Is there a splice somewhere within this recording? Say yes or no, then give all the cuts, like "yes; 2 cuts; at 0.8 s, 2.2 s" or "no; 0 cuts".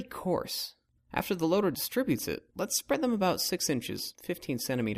yes; 1 cut; at 1.0 s